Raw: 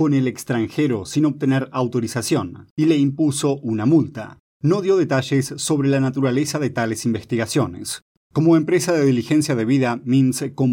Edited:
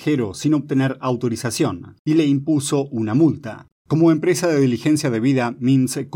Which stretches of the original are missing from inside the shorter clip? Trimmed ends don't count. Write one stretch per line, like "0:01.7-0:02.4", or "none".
0:04.4-0:08.2